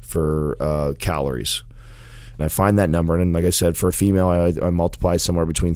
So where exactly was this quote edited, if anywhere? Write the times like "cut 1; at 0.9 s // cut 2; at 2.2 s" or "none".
cut 1; at 2.4 s